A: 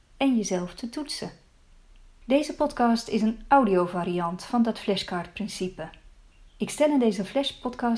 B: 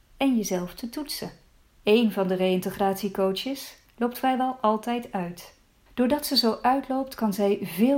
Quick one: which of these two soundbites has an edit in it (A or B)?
B